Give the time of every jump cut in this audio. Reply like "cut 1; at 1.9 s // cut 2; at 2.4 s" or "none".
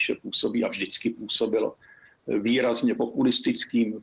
none